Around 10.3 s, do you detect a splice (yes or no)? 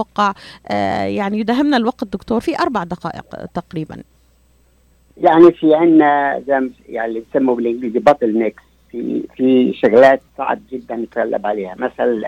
yes